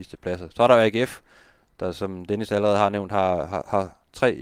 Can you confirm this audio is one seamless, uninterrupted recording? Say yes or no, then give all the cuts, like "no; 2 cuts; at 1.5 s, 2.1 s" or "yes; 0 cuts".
yes; 0 cuts